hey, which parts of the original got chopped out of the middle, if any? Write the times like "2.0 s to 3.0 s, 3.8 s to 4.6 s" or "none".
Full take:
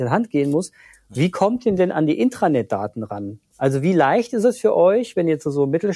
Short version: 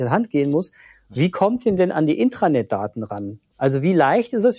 none